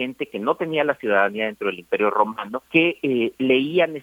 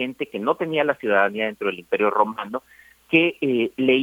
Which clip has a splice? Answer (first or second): first